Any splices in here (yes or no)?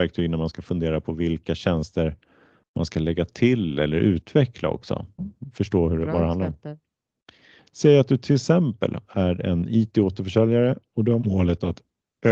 yes